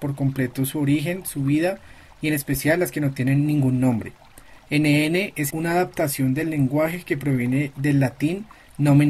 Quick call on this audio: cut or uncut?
cut